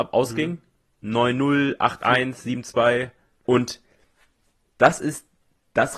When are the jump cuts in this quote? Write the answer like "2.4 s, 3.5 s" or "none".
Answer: 3.4 s